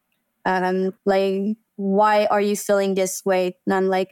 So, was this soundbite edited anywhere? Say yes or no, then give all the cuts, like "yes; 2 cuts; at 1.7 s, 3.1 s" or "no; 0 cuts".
yes; 1 cut; at 1.0 s